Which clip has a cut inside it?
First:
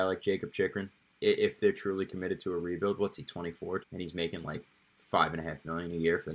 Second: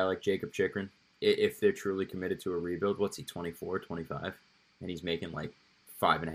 first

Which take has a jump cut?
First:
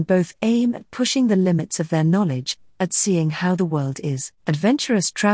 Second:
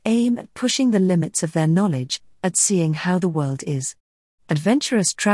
first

